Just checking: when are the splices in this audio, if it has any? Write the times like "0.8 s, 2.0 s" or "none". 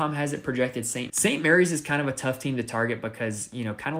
1.1 s